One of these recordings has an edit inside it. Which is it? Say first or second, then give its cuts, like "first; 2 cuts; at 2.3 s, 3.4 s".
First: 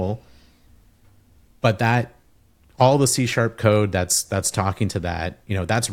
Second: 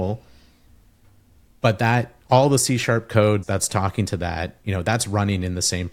second; 2 cuts; at 2.2 s, 3.4 s